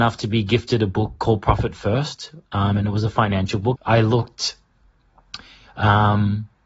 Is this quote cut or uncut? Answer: cut